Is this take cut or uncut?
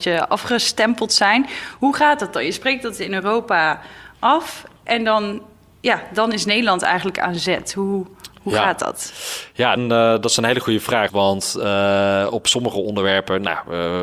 cut